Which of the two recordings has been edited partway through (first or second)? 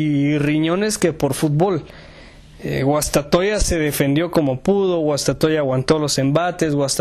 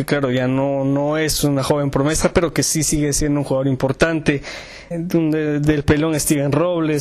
second